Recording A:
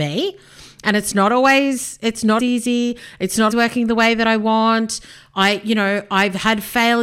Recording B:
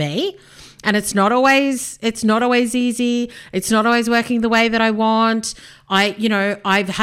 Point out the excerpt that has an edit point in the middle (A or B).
A